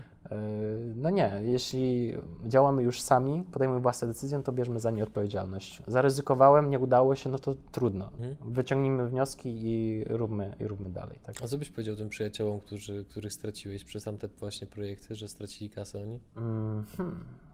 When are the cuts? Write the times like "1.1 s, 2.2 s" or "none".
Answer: 8.2 s

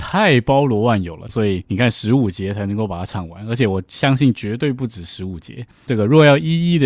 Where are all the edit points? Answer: 1.3 s, 5.9 s

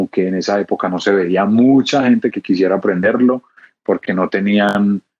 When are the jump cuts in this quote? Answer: none

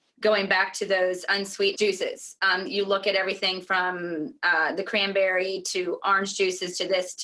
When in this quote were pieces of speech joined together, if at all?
1.7 s

